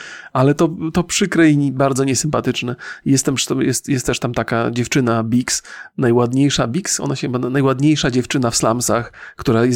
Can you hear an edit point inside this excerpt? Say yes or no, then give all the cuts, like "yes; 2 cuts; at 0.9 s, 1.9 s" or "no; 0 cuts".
no; 0 cuts